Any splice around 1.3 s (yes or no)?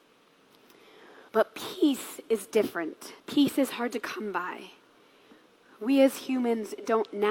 yes